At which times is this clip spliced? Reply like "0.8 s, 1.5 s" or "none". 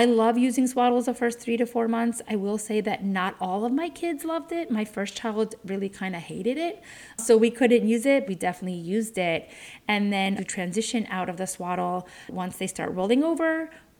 8.3 s, 10.4 s